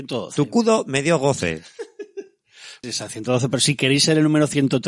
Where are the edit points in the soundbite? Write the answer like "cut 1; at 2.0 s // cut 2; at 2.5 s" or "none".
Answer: cut 1; at 2.8 s